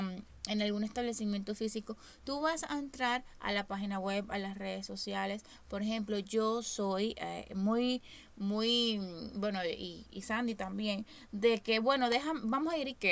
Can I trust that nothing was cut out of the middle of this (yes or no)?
yes